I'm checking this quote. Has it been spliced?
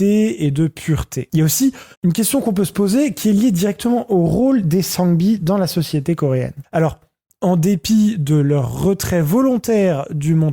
yes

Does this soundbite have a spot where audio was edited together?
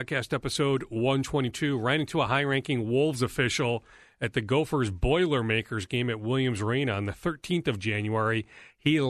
no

